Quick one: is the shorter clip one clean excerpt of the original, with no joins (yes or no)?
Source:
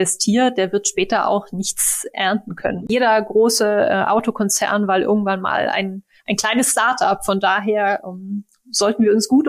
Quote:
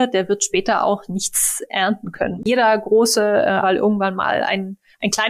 no